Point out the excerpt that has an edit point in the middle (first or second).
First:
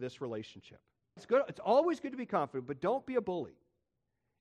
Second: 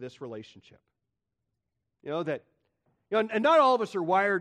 first